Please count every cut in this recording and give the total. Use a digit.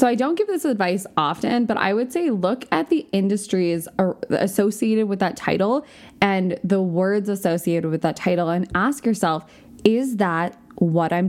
0